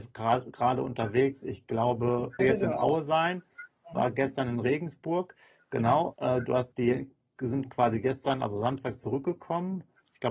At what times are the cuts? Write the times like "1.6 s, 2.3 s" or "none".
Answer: 2.4 s, 6.7 s